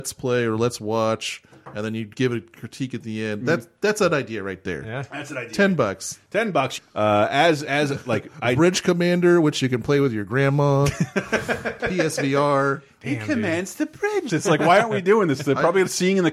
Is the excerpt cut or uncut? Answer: cut